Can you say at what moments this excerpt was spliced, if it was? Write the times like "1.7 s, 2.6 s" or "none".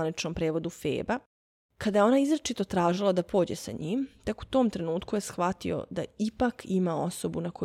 none